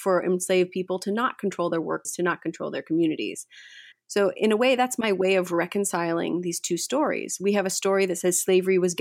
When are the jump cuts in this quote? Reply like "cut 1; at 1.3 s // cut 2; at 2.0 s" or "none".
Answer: cut 1; at 2.0 s // cut 2; at 3.9 s